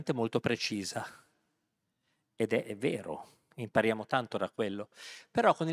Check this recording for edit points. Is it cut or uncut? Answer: uncut